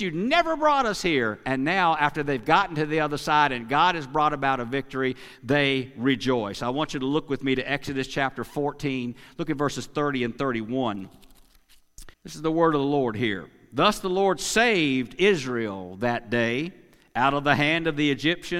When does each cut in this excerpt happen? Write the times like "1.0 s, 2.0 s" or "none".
12.1 s